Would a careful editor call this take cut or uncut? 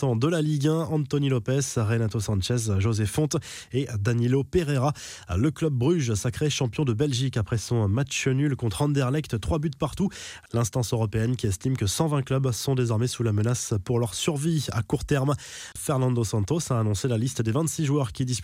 cut